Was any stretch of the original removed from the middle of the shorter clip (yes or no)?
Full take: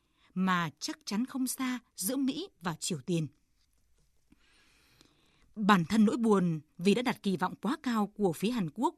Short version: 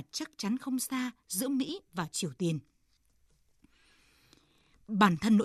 no